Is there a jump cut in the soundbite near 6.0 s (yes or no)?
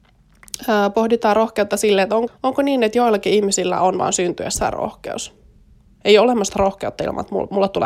yes